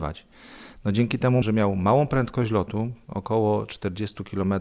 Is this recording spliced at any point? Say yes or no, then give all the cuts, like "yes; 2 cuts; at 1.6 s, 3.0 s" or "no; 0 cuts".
yes; 1 cut; at 1.4 s